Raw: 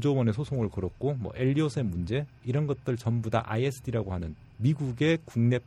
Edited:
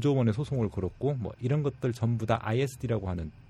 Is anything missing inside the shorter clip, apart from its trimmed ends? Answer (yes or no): yes